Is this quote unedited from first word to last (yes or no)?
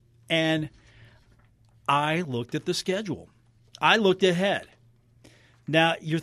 yes